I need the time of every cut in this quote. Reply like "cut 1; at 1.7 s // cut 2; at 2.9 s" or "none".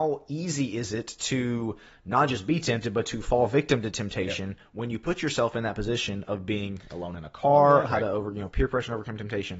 cut 1; at 7.9 s